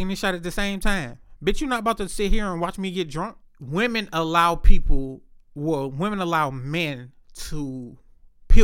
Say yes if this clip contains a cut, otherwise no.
yes